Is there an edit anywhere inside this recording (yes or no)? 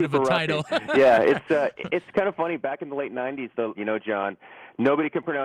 yes